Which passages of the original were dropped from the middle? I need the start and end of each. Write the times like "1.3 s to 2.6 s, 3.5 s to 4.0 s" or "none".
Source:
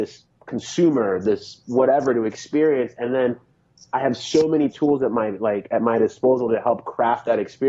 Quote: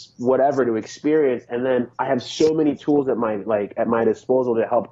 3.4 s to 3.9 s